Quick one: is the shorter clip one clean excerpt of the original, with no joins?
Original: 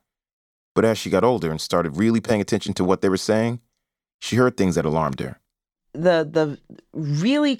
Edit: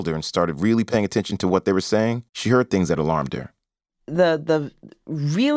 no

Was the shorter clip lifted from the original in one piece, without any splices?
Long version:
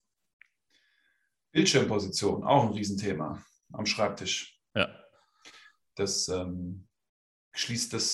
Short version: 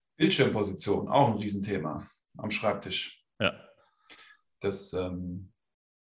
yes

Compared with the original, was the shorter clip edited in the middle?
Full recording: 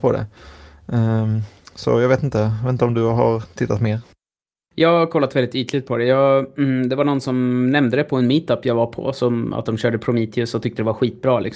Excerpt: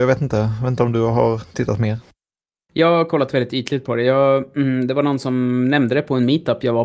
no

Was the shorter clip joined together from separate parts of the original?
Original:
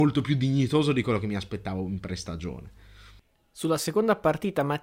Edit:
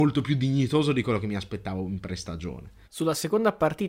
yes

